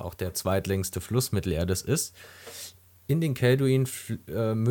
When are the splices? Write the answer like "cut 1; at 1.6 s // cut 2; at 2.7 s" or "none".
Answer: none

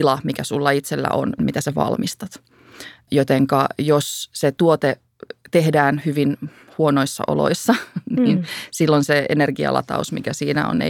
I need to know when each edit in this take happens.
cut 1; at 1.4 s

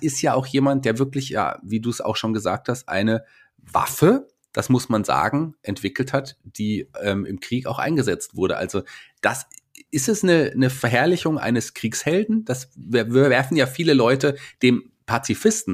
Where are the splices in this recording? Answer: none

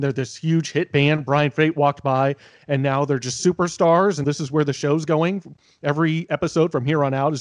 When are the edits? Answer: cut 1; at 4.2 s

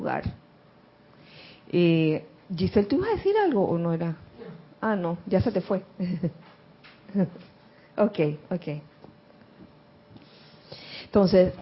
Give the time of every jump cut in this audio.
none

